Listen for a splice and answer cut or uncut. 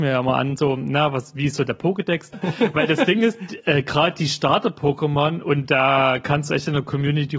cut